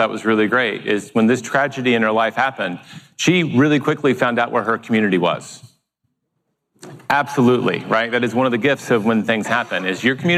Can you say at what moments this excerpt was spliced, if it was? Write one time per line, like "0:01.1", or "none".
none